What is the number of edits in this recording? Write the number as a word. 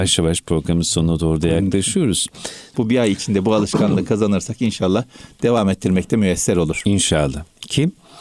one